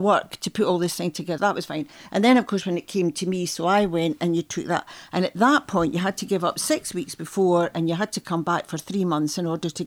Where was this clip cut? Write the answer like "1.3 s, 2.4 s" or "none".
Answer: 1.4 s

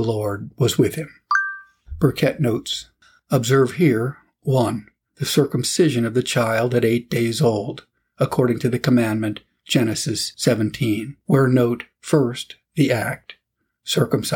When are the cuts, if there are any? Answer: none

